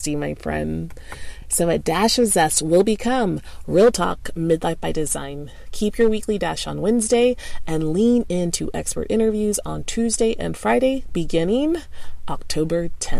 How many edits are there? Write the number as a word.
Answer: zero